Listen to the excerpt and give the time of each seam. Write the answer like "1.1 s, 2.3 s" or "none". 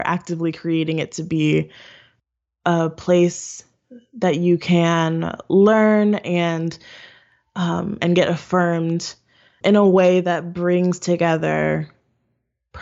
8.0 s, 9.6 s